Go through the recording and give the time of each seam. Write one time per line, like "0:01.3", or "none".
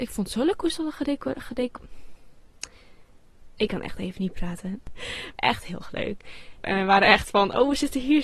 0:05.4
0:06.6